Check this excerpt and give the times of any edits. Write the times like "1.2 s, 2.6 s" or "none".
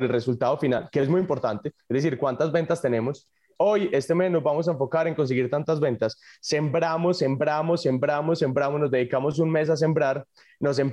3.6 s